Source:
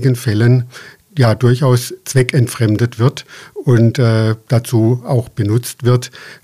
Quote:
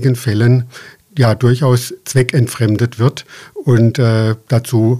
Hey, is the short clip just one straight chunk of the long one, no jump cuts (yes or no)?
yes